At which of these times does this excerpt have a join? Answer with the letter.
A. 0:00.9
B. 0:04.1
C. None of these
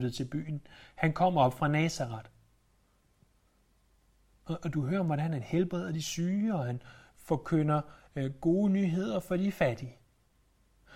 C